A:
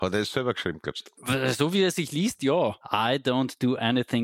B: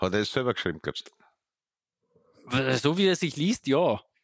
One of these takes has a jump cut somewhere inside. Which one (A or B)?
A